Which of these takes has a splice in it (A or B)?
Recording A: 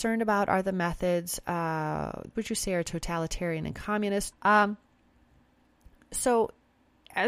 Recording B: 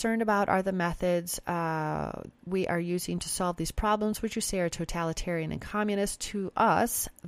A